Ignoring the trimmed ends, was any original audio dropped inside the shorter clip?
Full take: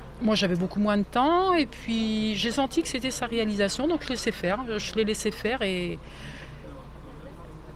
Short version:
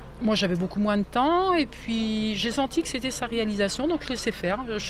no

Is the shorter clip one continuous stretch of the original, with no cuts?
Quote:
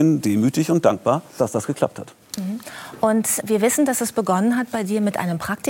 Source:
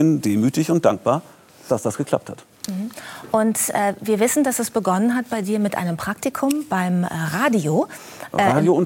no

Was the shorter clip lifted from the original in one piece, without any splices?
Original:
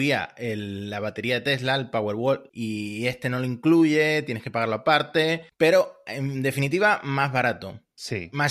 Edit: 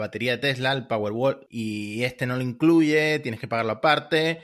yes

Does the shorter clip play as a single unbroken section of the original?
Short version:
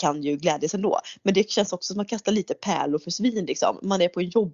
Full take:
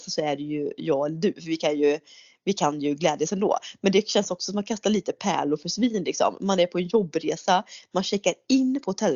yes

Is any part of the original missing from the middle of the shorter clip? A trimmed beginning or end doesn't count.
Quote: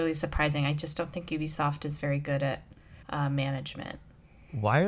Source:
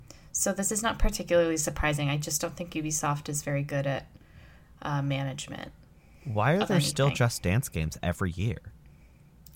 yes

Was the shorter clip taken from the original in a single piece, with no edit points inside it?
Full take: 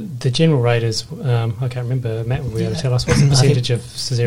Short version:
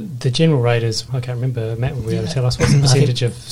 no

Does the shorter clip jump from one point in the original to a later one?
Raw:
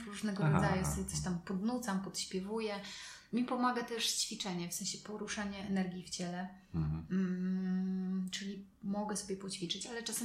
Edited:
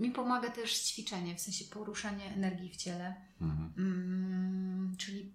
no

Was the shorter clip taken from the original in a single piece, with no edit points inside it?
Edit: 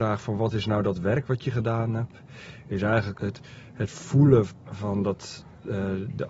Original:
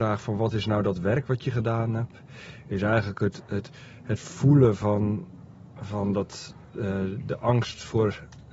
no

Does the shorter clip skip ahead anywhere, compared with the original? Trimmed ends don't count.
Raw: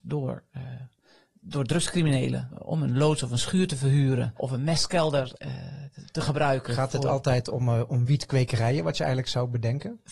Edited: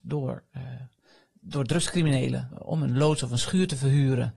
no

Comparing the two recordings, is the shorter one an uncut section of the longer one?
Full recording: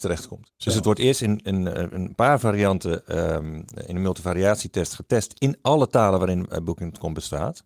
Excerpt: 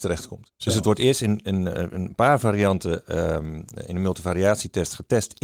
yes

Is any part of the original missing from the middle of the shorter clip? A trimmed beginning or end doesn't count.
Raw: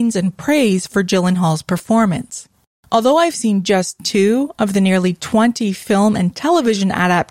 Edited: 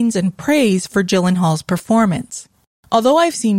no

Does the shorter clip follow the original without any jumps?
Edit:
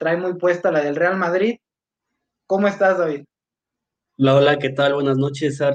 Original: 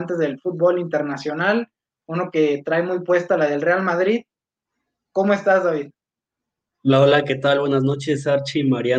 yes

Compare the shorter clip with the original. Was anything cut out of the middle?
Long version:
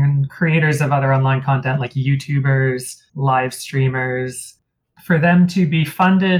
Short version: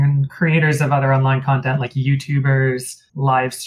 no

